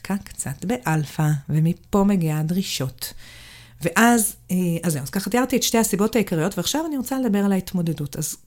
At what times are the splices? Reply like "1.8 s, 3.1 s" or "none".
none